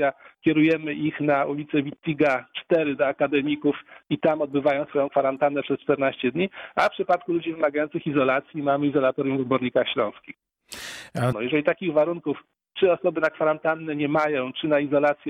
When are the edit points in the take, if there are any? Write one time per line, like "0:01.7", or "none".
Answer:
0:11.3